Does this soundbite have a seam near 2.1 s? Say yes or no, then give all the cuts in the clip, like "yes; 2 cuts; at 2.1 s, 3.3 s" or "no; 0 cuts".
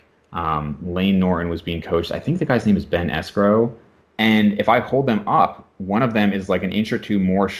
no; 1 cut; at 4.0 s